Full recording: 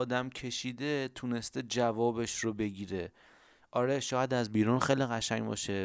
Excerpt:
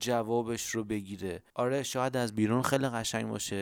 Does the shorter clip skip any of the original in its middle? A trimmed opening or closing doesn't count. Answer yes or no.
yes